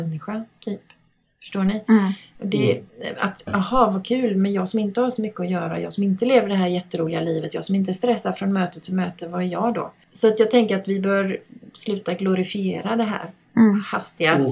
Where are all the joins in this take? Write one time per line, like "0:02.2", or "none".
0:03.4